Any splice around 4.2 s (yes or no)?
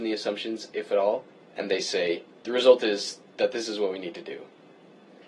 no